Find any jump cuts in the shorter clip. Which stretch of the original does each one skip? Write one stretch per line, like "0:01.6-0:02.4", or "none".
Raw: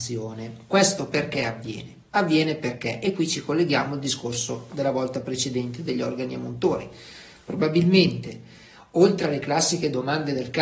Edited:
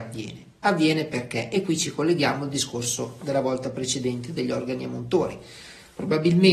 none